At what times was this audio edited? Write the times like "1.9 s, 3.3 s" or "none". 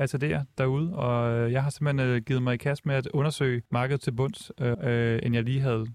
3.7 s, 4.7 s